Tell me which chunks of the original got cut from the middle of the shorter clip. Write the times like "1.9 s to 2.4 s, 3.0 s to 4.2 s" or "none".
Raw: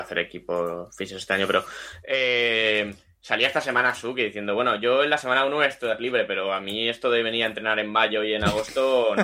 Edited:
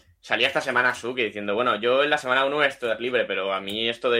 none